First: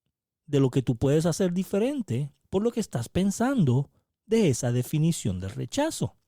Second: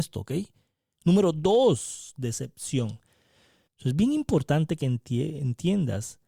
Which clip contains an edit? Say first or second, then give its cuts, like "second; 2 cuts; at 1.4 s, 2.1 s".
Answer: second; 2 cuts; at 0.9 s, 3.7 s